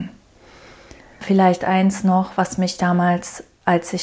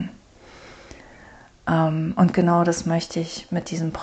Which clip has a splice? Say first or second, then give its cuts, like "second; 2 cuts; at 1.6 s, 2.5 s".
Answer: first; 1 cut; at 1.2 s